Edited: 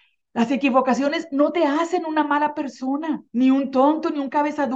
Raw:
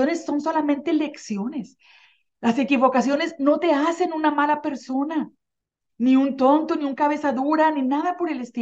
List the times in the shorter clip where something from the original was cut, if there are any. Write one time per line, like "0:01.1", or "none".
0:03.3

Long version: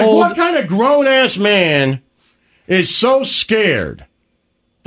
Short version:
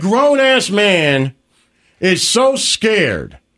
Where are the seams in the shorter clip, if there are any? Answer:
none

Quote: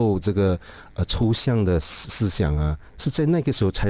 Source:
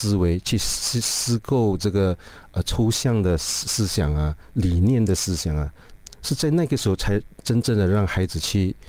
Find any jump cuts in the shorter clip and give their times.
0:02.9

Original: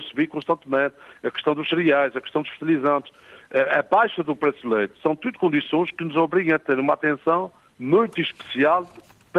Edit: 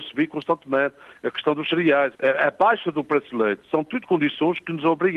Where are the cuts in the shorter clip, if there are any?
0:02.1

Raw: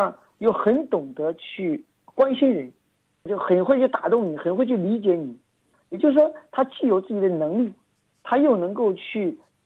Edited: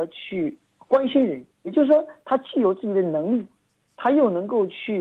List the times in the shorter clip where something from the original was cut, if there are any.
0:01.6

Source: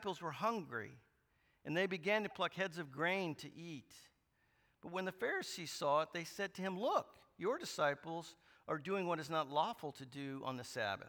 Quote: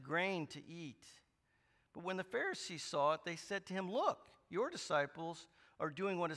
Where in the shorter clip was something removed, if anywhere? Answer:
none

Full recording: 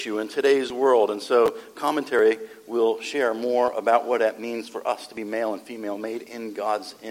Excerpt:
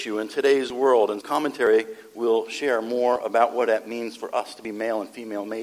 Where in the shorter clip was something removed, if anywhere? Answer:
0:01.2

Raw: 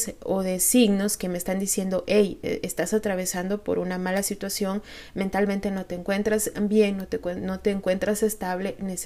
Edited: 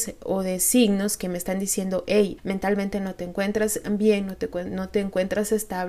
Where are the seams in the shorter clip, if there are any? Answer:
0:02.4

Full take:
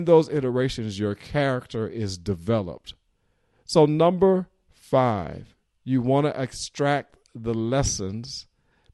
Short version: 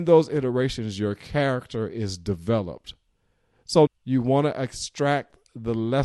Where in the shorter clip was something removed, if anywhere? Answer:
0:03.9

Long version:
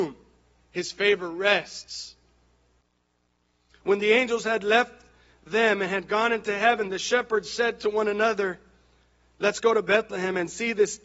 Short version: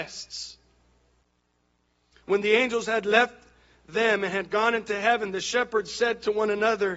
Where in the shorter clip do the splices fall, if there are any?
none

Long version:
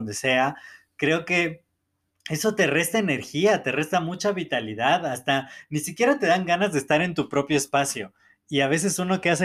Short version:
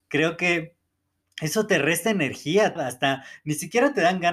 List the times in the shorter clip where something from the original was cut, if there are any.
0:02.8

